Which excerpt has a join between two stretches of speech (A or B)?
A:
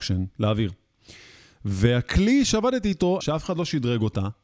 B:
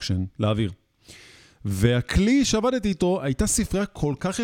A